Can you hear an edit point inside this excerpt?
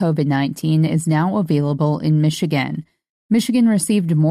no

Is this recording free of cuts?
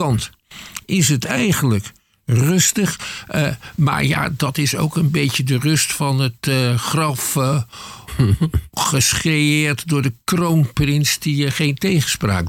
yes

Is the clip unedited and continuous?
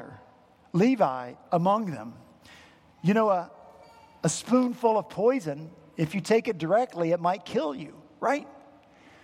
yes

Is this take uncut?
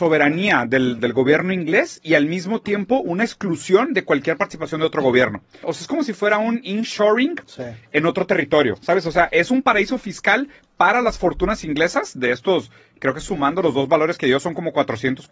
no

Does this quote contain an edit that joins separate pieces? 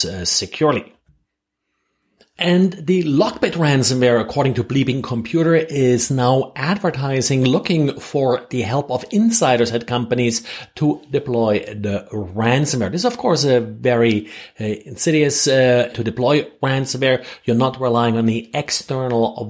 yes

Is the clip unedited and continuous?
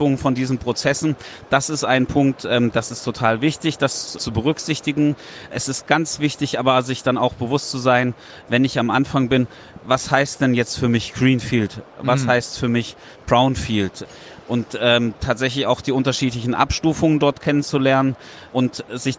yes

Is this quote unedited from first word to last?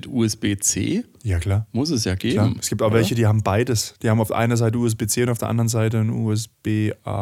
yes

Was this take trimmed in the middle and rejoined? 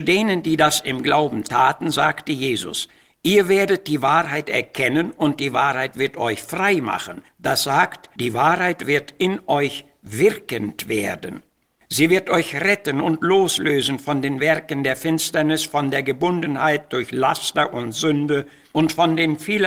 no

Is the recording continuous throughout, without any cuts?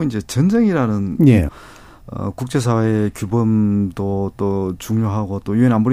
no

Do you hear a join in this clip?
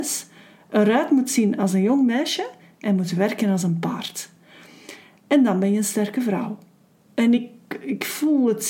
no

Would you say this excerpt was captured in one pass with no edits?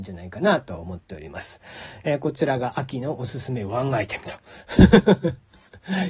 yes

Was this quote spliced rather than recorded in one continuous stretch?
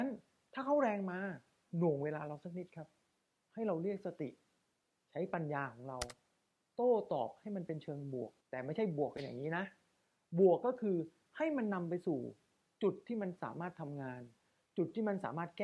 yes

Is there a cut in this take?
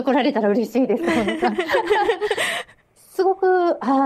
no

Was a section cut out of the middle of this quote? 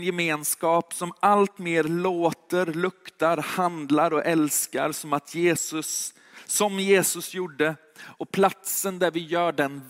no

